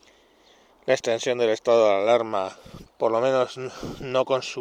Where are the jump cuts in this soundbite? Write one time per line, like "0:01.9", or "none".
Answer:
0:02.9